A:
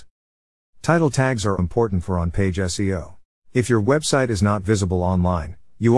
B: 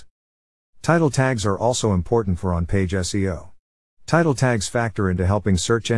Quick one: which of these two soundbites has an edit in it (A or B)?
A